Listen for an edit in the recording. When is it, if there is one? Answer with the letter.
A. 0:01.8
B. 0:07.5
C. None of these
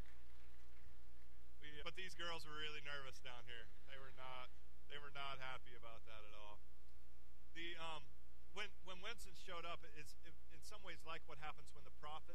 A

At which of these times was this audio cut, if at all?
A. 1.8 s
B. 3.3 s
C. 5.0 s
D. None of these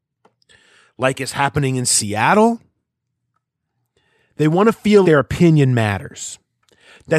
C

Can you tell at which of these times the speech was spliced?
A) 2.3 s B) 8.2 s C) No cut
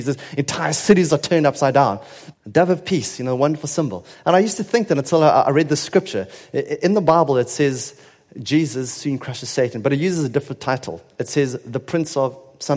A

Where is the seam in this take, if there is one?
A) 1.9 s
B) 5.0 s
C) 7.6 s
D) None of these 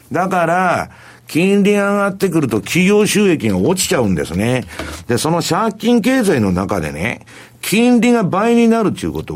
B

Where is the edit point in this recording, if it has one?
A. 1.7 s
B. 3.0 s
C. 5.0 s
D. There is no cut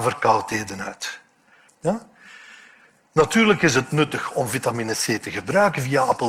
A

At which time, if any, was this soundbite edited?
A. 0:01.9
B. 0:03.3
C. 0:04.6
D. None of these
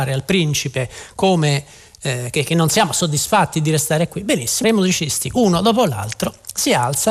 C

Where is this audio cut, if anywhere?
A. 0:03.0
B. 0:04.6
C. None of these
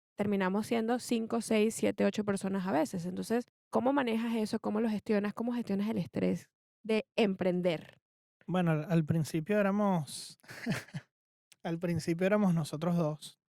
C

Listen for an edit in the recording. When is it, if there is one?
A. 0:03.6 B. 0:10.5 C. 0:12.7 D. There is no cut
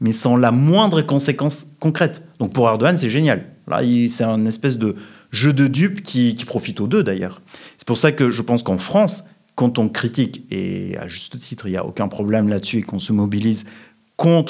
D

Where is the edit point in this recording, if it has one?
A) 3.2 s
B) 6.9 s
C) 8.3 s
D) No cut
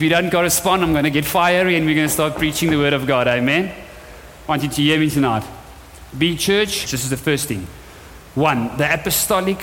B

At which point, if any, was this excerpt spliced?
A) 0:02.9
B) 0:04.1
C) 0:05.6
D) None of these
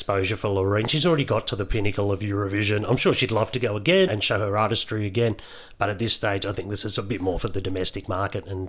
B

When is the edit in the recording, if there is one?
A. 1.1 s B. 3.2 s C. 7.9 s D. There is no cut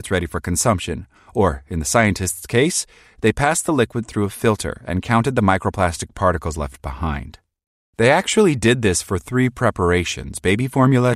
D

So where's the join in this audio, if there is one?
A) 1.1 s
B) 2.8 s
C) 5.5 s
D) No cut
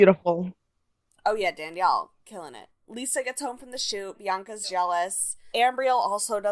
C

